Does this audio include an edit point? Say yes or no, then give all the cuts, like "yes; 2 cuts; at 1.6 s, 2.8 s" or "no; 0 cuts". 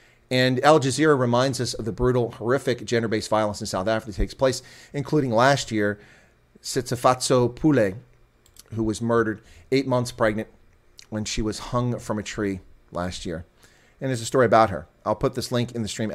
no; 0 cuts